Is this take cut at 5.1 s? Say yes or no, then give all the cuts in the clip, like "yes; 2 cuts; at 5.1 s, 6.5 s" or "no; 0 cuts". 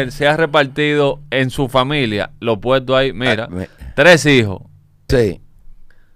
yes; 1 cut; at 5.1 s